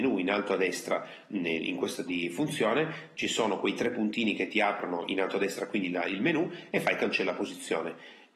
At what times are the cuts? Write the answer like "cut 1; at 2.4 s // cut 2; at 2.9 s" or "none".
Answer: cut 1; at 2.1 s